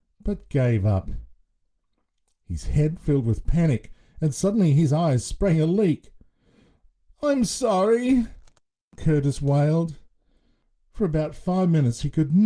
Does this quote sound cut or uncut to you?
uncut